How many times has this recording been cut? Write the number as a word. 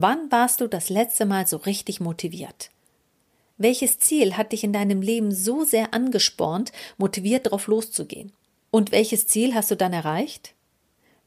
zero